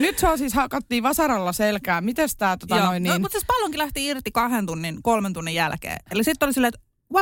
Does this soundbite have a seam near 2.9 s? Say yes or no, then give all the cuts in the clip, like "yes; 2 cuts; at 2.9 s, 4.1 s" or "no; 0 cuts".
no; 0 cuts